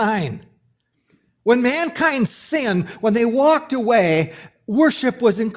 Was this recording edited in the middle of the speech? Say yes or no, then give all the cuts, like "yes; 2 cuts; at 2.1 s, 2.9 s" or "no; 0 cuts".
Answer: no; 0 cuts